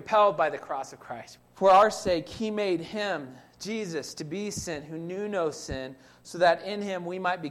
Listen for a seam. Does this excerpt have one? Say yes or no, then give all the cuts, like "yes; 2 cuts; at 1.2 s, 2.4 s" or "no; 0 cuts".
yes; 1 cut; at 1.4 s